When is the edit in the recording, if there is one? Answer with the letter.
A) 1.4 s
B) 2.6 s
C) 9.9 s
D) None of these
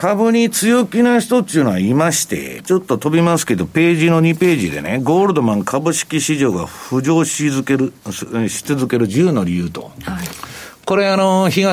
B